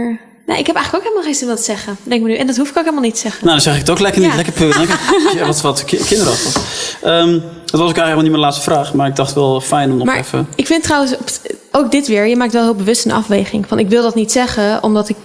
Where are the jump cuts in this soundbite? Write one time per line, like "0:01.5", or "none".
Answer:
none